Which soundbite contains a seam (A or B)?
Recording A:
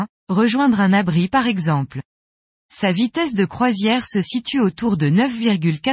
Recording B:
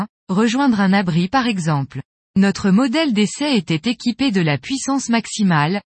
B